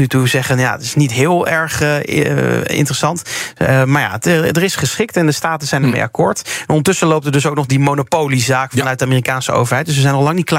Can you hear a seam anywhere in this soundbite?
no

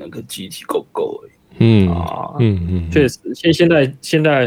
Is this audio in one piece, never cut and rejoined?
yes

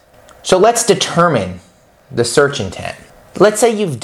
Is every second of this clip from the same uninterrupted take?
yes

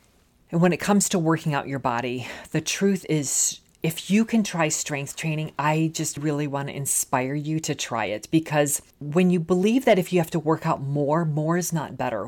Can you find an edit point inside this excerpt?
yes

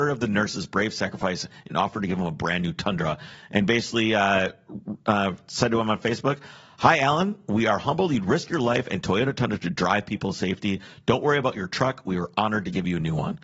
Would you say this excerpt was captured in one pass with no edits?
yes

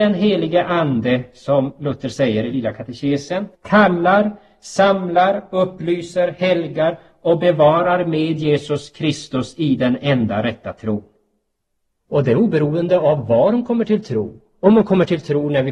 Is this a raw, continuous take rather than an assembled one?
no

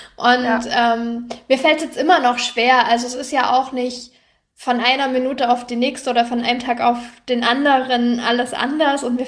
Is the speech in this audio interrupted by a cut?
no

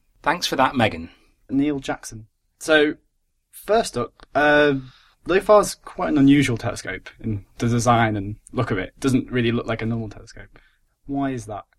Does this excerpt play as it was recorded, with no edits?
no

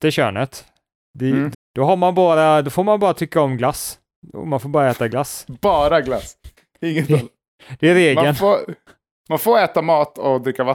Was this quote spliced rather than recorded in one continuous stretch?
yes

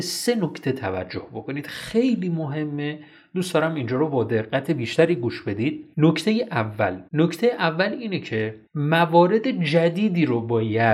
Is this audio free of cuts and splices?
no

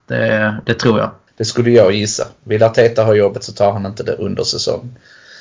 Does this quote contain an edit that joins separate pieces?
yes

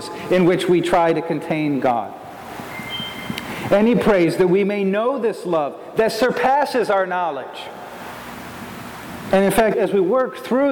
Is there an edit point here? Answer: yes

